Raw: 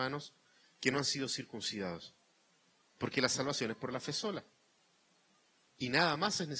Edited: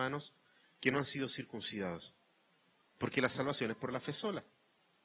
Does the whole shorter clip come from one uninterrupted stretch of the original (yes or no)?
yes